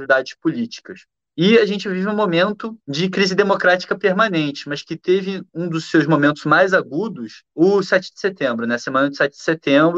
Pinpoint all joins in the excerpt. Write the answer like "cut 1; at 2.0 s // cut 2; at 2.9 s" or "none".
none